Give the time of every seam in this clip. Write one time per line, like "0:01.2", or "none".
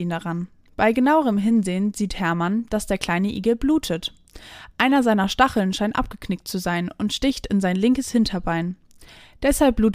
none